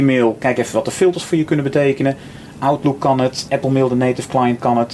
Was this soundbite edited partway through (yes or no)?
yes